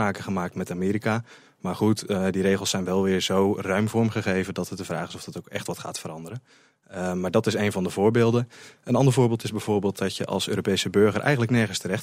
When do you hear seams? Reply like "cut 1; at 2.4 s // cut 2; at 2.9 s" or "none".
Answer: none